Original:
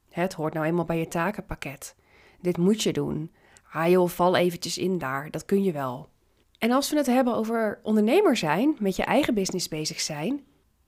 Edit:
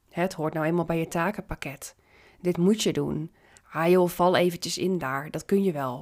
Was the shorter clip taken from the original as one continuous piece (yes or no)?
yes